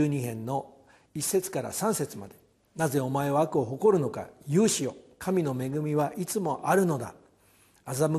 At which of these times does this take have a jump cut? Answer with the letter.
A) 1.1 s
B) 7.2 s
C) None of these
A